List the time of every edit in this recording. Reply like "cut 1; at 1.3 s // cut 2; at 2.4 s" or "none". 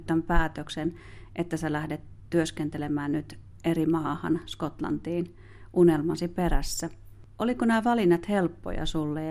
none